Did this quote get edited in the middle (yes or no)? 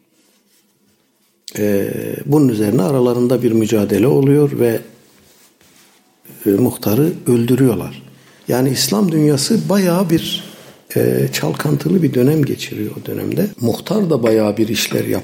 yes